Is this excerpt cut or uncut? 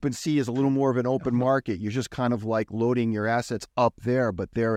uncut